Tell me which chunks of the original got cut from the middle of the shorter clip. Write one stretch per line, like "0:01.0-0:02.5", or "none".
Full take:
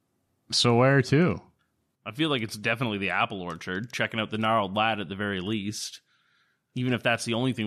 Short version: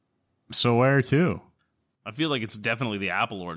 none